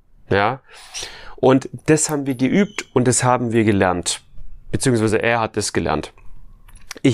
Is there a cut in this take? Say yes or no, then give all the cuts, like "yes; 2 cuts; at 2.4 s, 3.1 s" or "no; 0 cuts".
no; 0 cuts